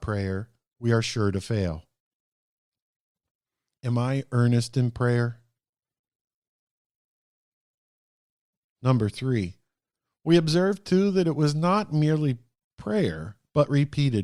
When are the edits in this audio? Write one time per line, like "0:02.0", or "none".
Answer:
none